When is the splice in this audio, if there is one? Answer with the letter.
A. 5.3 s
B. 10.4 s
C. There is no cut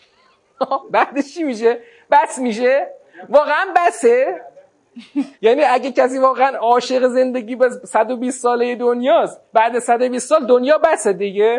A